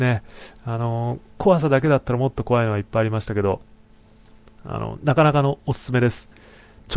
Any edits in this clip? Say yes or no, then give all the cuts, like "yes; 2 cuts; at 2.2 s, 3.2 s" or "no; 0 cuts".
no; 0 cuts